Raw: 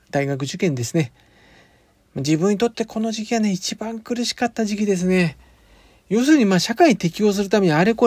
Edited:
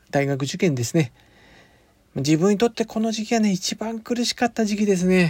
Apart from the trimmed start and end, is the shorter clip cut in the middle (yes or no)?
no